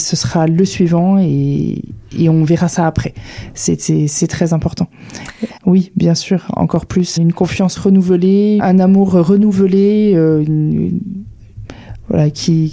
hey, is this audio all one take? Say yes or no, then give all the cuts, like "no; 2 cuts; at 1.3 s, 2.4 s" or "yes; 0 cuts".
no; 3 cuts; at 5.6 s, 7.2 s, 8.6 s